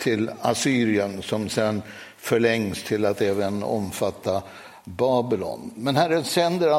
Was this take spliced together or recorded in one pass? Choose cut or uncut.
uncut